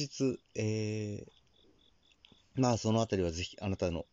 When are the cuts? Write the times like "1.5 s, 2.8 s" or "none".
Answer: 2.4 s